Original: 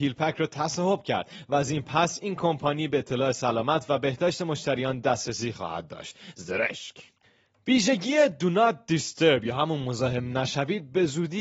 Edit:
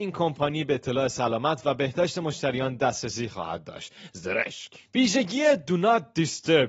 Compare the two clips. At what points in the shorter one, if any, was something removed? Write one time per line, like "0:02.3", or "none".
0:04.9